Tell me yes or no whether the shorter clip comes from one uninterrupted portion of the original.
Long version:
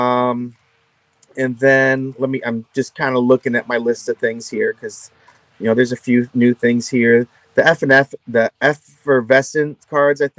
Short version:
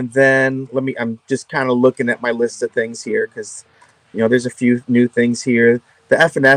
yes